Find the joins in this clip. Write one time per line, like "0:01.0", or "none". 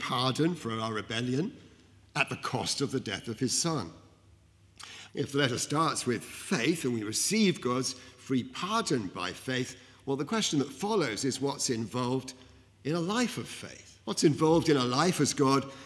0:05.1
0:14.0